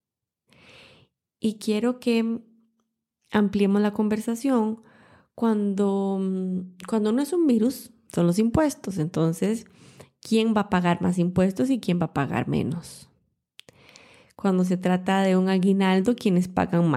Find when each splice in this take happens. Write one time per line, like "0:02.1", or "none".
0:08.1